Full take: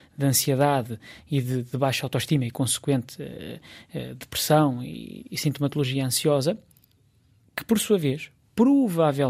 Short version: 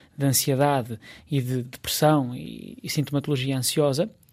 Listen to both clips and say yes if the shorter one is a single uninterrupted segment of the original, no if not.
no